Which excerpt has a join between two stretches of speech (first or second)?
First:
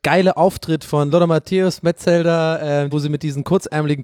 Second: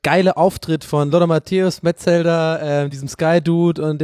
first